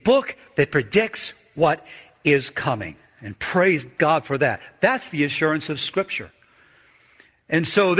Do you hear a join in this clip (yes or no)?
no